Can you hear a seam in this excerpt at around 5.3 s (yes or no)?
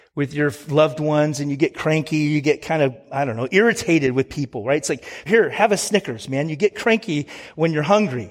yes